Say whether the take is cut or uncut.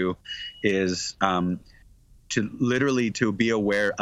uncut